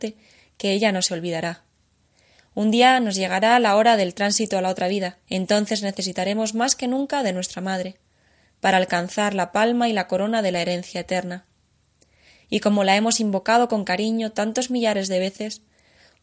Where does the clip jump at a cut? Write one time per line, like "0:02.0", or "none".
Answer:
0:05.2